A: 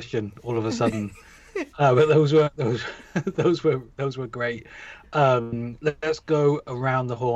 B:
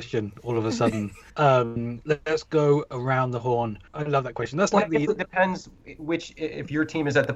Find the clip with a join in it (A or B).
B